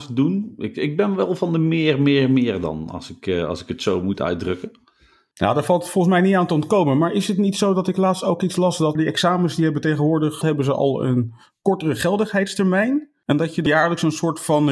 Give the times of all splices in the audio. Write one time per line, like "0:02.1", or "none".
0:09.0
0:10.4